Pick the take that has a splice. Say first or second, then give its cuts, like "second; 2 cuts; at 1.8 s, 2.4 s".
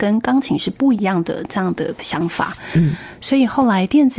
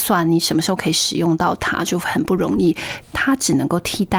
second; 1 cut; at 3.0 s